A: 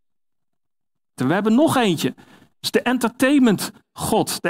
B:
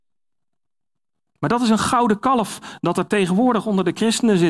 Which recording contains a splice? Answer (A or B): A